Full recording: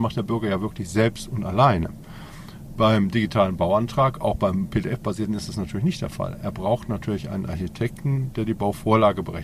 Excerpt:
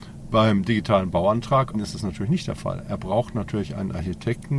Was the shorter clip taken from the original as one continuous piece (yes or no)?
no